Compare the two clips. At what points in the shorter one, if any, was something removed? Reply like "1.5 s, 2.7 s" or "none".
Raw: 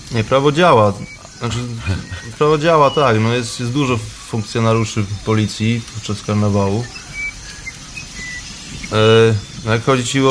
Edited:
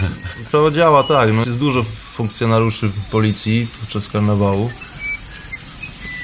1.4 s